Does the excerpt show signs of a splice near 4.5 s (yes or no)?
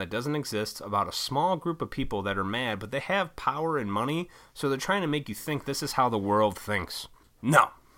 no